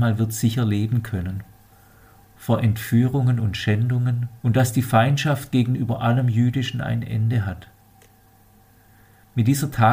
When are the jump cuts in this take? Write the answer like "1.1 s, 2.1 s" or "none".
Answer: 2.2 s, 4.4 s